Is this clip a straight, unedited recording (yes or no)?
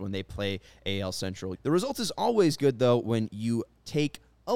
no